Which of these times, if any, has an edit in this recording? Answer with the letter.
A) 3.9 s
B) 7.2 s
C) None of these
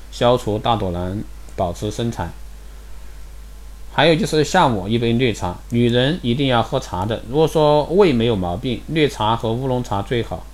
C